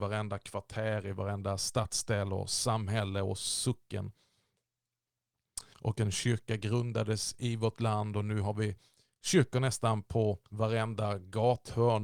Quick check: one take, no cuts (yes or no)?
no